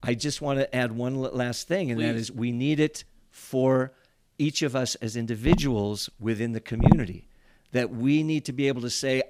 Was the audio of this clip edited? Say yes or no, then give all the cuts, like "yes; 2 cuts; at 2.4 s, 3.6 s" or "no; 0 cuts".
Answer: no; 0 cuts